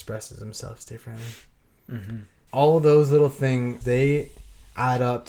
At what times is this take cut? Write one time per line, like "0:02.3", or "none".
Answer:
0:02.5
0:03.8